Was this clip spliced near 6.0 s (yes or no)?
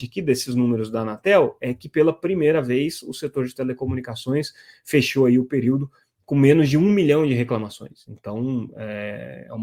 no